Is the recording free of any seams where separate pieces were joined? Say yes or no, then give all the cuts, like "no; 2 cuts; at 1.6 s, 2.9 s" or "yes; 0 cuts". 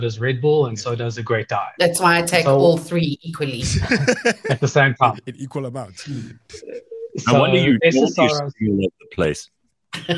yes; 0 cuts